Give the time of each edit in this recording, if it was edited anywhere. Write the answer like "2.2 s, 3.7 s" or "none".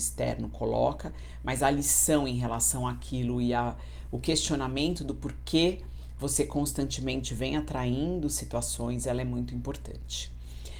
none